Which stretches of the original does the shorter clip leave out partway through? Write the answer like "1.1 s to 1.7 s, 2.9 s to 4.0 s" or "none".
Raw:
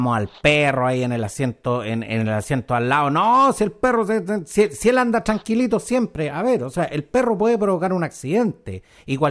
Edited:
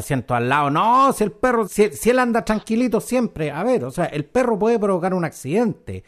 4.1 s to 4.5 s

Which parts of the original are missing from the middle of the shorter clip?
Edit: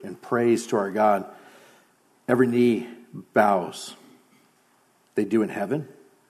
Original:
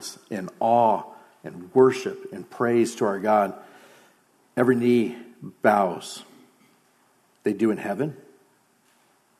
none

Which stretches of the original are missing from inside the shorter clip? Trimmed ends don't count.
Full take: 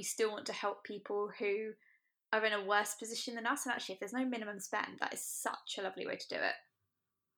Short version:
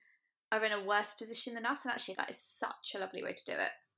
4.0 s to 5.0 s

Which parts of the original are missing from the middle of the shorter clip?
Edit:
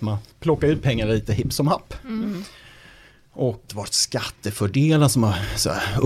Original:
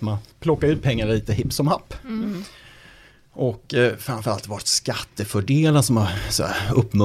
3.7 s to 4.4 s

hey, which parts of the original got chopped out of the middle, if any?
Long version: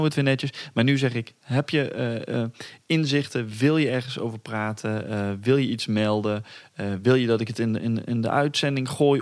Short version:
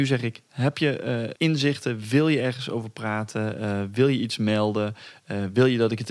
2.3 s to 2.8 s

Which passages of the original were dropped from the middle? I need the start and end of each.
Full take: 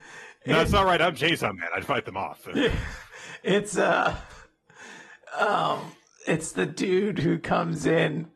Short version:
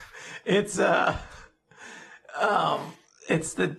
none

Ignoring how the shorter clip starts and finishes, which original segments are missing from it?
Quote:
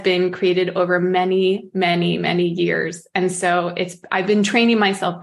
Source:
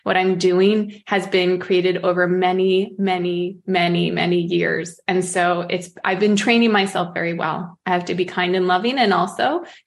3.0 s to 3.6 s

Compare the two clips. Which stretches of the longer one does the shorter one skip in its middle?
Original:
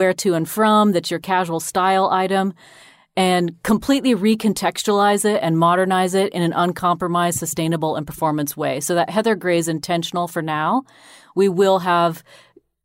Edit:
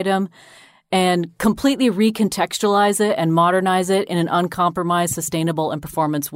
none

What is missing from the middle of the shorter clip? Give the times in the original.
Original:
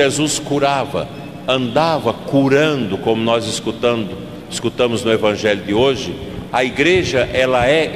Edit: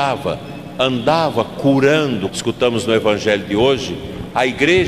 3.0 s to 4.5 s

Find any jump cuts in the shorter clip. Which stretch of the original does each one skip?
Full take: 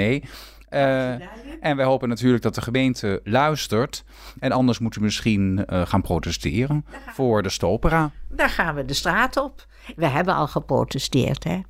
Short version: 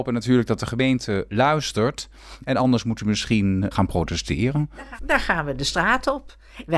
5.7 s to 5.9 s, 7.1 s to 8.3 s

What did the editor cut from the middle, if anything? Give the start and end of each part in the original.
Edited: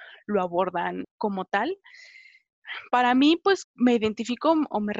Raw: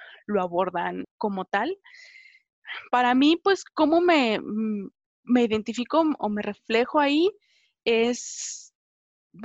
3.6 s to 5.1 s

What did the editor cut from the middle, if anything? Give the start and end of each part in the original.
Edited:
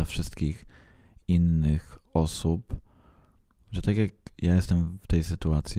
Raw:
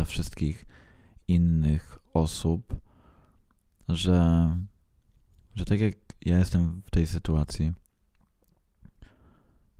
3.6 s to 5.4 s

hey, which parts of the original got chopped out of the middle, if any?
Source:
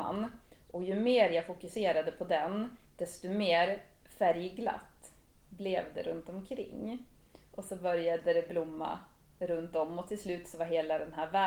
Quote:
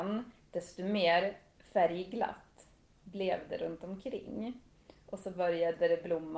none

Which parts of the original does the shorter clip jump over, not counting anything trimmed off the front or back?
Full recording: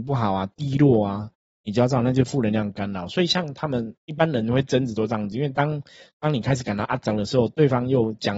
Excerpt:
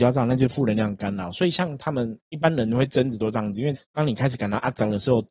5.5 s to 6.0 s

